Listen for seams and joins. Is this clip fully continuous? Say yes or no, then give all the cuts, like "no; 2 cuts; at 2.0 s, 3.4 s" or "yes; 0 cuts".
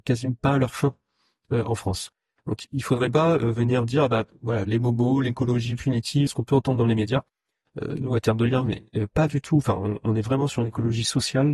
no; 1 cut; at 6.3 s